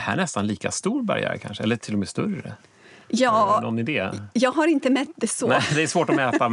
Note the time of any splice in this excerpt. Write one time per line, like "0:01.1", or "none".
none